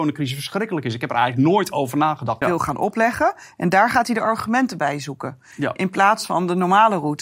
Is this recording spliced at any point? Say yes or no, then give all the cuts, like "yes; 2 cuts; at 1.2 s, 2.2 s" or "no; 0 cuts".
yes; 1 cut; at 2.4 s